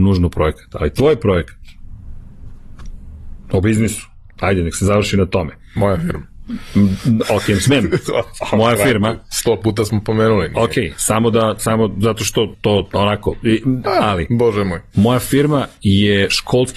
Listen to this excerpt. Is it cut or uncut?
cut